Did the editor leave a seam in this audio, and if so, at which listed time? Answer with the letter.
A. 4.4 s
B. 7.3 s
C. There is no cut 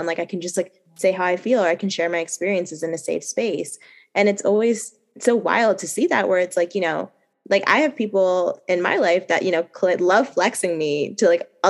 C